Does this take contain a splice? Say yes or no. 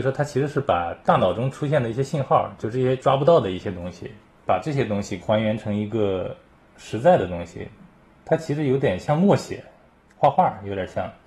no